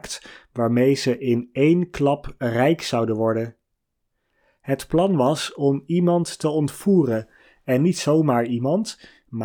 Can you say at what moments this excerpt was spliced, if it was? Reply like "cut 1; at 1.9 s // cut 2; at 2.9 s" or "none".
none